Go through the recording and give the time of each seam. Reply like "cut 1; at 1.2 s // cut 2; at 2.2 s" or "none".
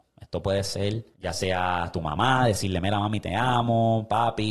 cut 1; at 1.1 s